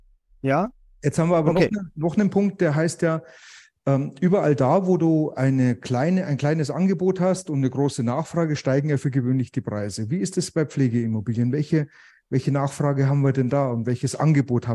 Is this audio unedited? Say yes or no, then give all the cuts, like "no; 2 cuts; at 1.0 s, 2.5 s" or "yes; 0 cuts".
yes; 0 cuts